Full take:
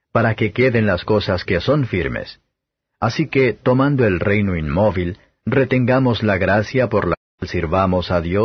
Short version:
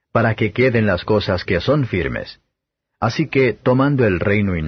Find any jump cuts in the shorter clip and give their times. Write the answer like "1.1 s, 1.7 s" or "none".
none